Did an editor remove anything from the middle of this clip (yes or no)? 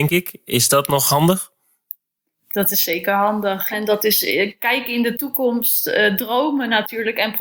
yes